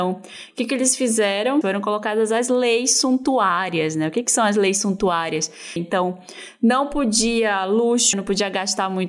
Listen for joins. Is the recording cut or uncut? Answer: cut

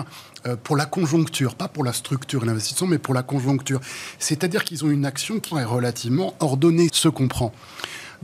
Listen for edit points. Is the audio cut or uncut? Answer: cut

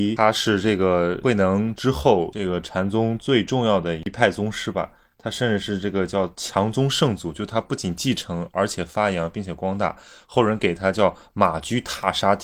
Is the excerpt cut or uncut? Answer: uncut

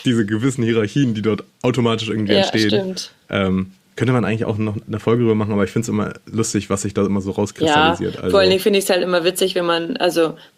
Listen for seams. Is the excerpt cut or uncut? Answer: uncut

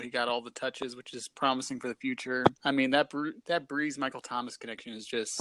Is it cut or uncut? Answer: cut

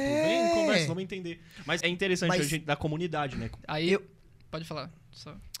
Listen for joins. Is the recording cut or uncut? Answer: cut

